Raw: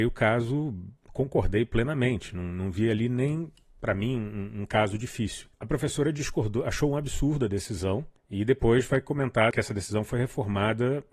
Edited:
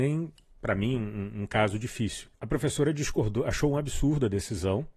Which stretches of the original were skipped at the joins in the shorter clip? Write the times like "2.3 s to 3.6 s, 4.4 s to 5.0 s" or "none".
none